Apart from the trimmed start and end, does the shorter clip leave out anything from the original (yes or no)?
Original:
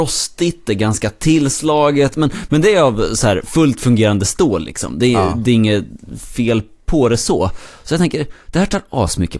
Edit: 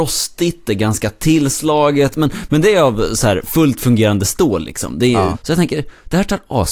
yes